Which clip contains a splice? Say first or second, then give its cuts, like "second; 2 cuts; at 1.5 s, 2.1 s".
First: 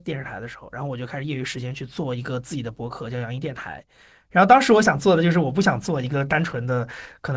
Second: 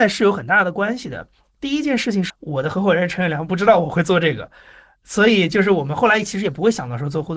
second; 1 cut; at 2.3 s